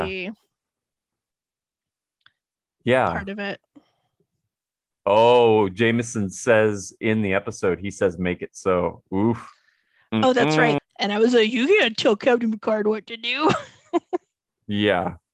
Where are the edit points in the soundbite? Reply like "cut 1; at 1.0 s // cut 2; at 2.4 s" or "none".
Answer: cut 1; at 10.8 s

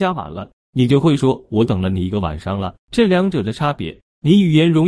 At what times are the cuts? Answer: cut 1; at 2.8 s

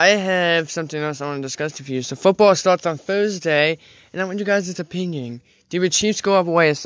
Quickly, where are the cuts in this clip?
none

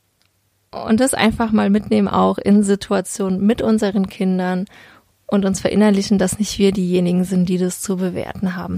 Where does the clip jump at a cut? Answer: none

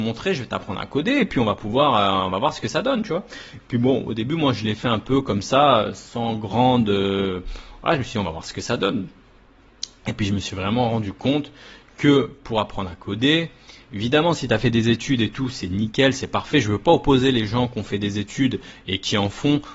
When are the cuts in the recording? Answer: none

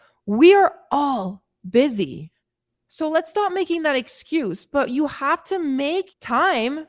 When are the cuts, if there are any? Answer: none

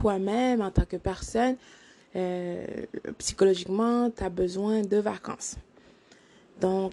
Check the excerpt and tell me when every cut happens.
none

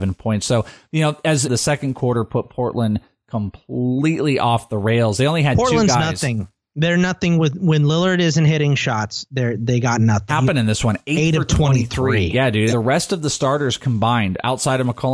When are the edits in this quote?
cut 1; at 1.4 s // cut 2; at 10.3 s // cut 3; at 12.7 s

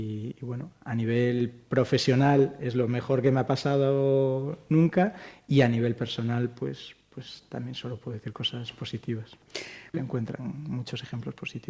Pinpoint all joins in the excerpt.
cut 1; at 9.9 s

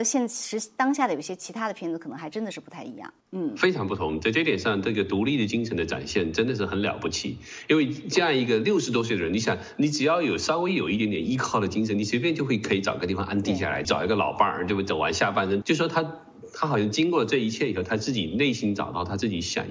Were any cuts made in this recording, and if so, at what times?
cut 1; at 3.2 s // cut 2; at 13.8 s // cut 3; at 15.6 s

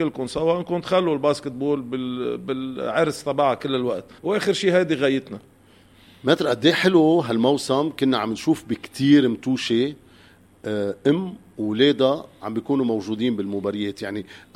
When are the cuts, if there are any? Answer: cut 1; at 4.2 s

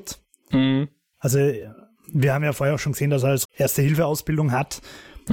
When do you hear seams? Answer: cut 1; at 3.4 s

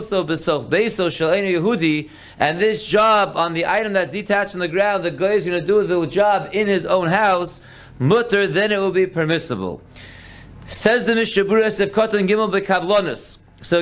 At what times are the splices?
none

